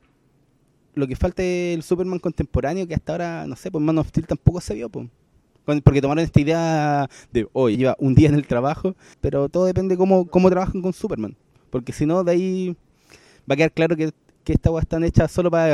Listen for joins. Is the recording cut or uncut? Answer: cut